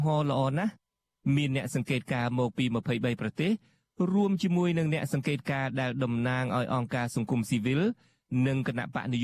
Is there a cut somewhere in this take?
no; 0 cuts

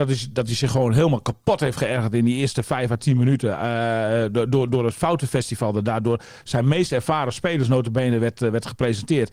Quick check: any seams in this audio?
no; 0 cuts

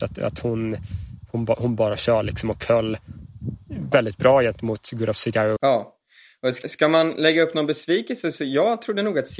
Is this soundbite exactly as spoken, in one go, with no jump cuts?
no; 3 cuts; at 3.9 s, 5.6 s, 6.6 s

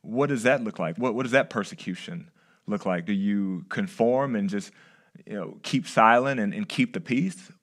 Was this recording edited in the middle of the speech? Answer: no; 0 cuts

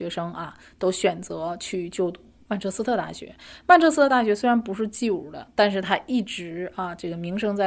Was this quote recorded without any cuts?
yes; 0 cuts

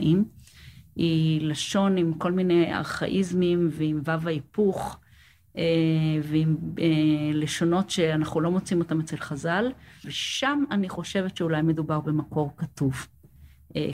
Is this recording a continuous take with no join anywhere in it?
no; 1 cut; at 10.0 s

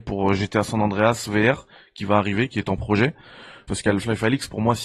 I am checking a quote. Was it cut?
yes; 1 cut; at 3.7 s

